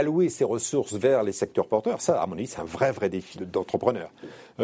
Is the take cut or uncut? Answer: cut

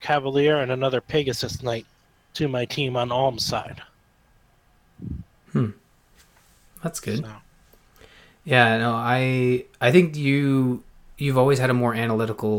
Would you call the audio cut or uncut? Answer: uncut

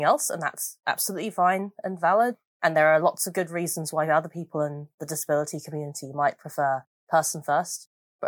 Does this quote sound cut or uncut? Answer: uncut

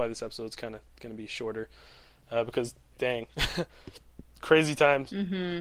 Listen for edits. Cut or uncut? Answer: uncut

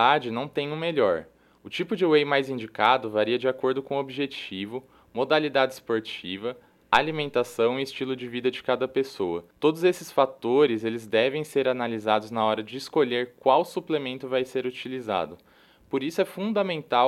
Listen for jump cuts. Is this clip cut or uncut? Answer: cut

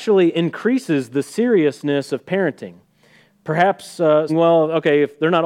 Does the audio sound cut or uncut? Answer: cut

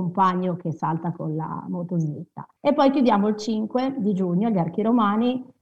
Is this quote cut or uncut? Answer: cut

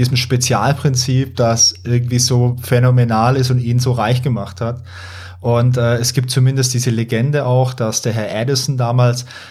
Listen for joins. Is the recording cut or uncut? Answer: uncut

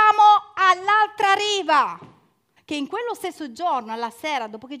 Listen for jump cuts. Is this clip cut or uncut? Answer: cut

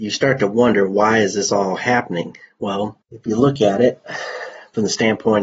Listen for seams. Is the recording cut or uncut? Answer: cut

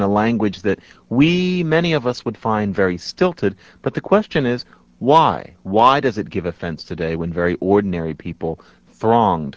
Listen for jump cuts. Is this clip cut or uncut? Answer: uncut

